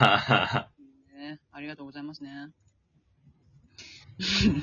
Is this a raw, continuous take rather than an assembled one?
yes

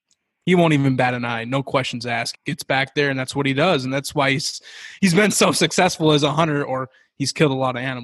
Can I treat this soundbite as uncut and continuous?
no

